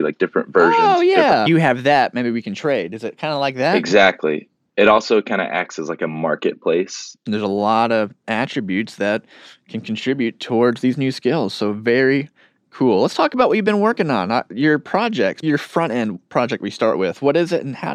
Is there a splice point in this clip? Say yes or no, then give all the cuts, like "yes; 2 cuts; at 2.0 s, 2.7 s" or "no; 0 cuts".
yes; 3 cuts; at 1.5 s, 7.3 s, 15.4 s